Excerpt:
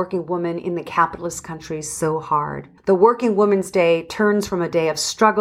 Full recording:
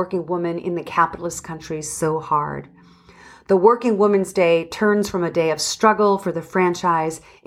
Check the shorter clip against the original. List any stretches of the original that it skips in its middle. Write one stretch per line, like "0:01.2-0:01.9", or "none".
0:02.8-0:03.4